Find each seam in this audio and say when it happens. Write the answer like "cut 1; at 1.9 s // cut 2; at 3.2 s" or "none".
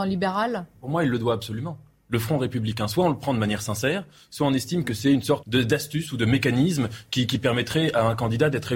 cut 1; at 5.4 s